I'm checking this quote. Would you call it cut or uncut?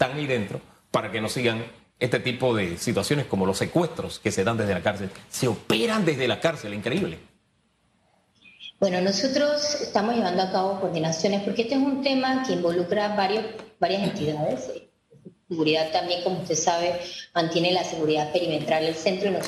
uncut